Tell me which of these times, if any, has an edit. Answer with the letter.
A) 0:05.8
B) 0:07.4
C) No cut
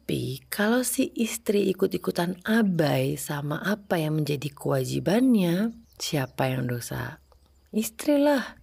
A